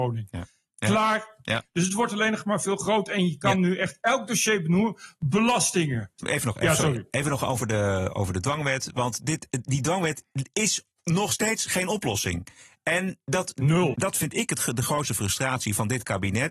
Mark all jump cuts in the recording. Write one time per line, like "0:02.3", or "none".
0:13.9